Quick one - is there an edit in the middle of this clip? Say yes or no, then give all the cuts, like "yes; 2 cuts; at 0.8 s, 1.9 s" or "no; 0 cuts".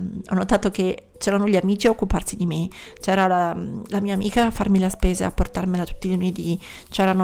no; 0 cuts